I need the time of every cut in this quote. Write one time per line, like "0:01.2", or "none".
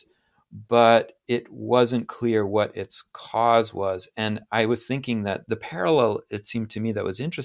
0:05.4